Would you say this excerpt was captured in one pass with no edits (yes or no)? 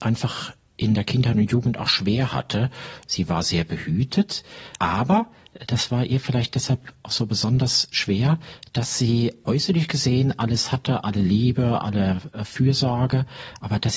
no